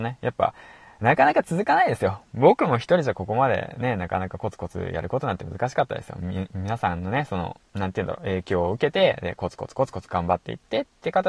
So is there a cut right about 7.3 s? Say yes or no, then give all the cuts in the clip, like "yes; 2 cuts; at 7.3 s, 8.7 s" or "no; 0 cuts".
no; 0 cuts